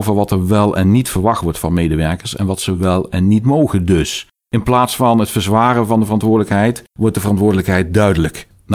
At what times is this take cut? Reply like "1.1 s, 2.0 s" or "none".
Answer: none